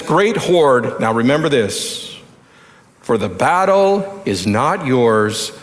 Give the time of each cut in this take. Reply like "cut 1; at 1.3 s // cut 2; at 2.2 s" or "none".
none